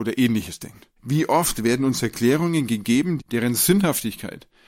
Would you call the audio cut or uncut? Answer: cut